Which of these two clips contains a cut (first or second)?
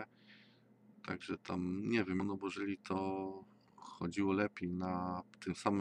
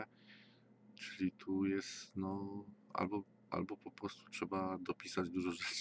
first